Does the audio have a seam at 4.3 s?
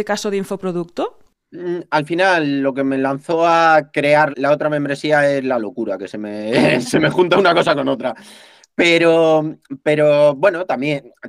yes; 1 cut; at 4.3 s

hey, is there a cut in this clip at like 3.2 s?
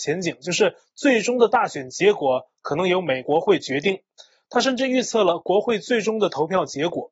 yes; 1 cut; at 3.2 s

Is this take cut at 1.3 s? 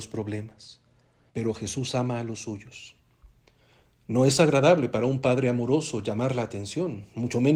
yes; 1 cut; at 1.3 s

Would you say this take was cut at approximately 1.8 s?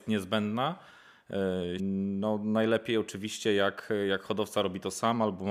yes; 1 cut; at 1.8 s

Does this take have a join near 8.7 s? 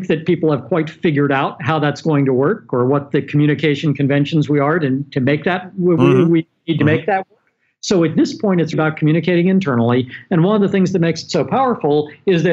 yes; 1 cut; at 8.7 s

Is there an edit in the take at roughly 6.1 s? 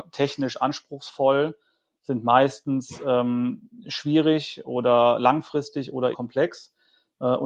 yes; 1 cut; at 6.1 s

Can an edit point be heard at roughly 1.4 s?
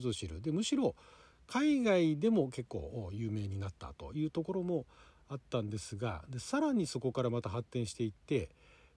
no; 0 cuts

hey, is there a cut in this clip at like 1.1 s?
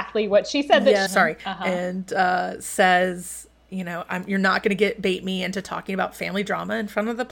yes; 1 cut; at 1.1 s

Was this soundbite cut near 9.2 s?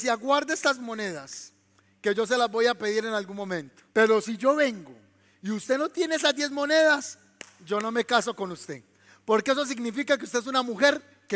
no; 1 cut; at 3.9 s

